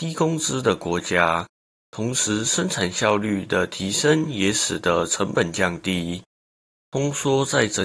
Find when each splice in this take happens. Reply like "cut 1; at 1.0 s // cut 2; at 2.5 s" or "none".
cut 1; at 6.8 s